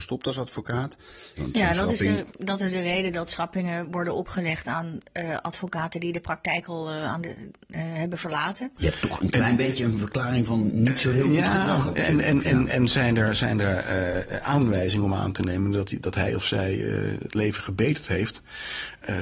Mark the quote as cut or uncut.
cut